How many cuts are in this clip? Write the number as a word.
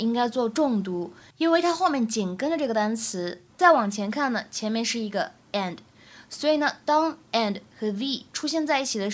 one